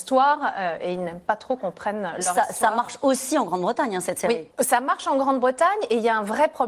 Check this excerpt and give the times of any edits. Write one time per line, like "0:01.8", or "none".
0:04.5